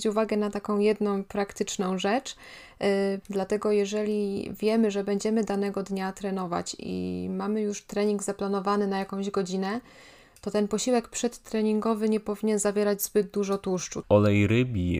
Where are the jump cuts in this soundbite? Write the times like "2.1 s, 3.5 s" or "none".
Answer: 3.2 s, 14.0 s